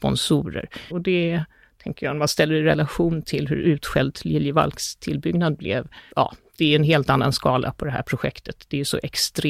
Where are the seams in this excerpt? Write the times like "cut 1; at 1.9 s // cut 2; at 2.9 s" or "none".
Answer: cut 1; at 0.9 s // cut 2; at 6.1 s